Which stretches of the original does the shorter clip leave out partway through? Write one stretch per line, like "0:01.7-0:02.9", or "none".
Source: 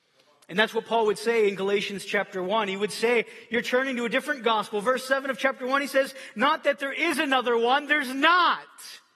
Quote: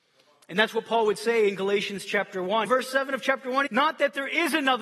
0:02.7-0:04.8
0:05.8-0:06.3